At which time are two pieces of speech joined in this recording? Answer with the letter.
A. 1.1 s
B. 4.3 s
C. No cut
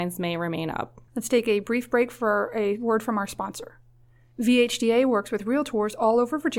A